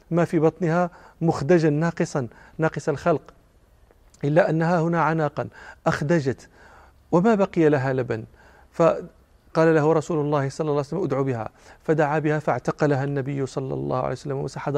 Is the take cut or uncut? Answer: uncut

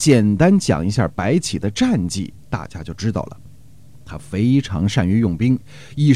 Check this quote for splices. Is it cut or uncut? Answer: cut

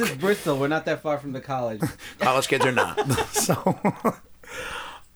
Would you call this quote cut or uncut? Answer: cut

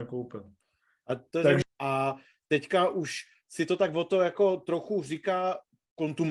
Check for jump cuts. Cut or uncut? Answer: cut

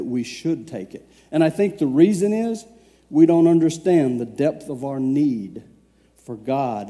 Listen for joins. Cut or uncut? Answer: uncut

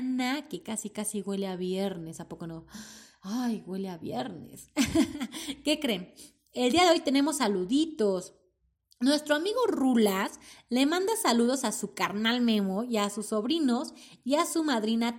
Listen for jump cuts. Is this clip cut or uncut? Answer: uncut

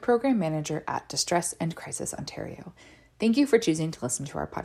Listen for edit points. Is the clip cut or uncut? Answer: uncut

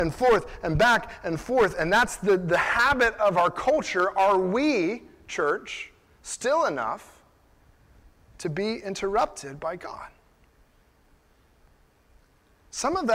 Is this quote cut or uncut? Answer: uncut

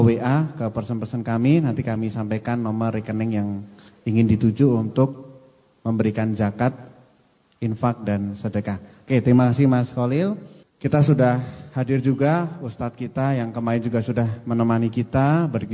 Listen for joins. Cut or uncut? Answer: cut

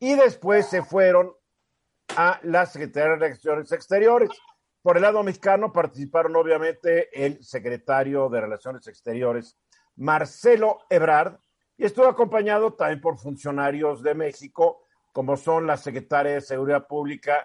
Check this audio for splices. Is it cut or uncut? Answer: uncut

